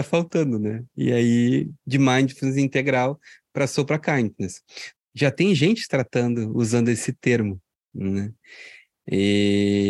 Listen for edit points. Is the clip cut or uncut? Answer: cut